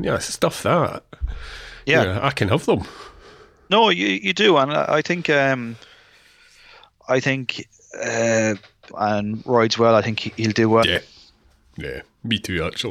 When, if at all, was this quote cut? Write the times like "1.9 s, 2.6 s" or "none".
8.9 s, 10.8 s

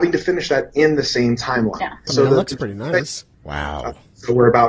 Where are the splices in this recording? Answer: 2.1 s, 3.3 s

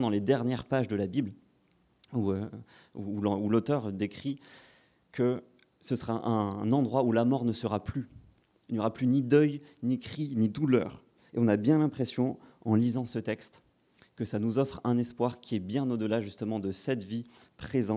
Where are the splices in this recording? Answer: 11.3 s

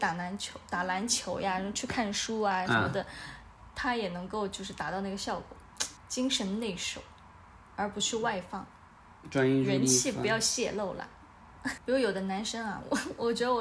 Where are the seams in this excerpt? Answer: 6.0 s, 11.8 s

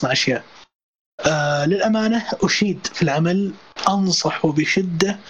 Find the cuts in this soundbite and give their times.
none

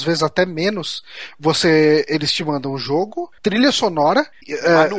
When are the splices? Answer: none

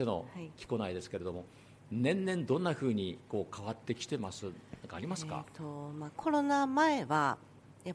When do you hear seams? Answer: none

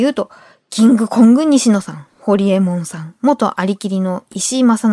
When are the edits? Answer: none

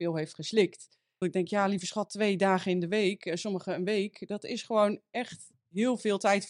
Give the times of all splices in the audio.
1.2 s

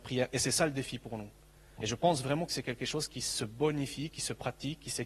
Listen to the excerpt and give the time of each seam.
1.8 s

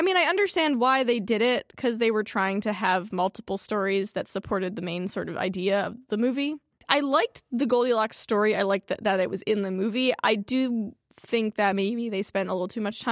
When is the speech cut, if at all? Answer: none

